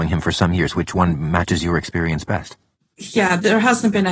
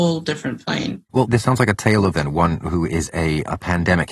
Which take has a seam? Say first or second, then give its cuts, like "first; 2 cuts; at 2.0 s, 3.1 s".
second; 2 cuts; at 1.1 s, 2.1 s